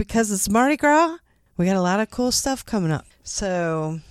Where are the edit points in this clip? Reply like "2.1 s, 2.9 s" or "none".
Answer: 1.5 s, 3.1 s